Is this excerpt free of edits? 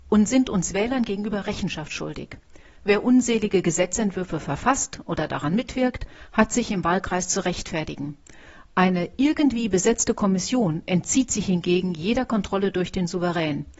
yes; 0 cuts

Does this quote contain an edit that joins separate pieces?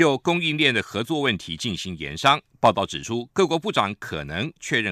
no; 0 cuts

